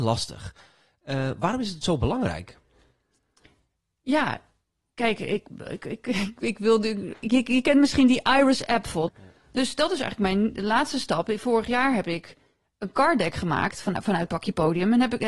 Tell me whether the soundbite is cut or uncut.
cut